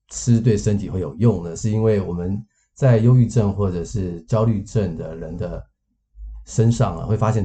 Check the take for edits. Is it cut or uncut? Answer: uncut